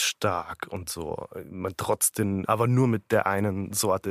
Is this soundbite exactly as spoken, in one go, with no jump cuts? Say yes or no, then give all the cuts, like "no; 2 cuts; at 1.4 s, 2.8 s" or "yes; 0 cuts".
no; 1 cut; at 2.4 s